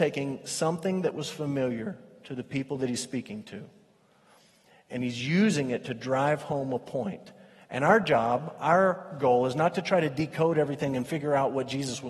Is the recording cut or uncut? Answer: uncut